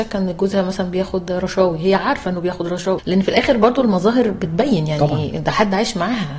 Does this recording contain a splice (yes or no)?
yes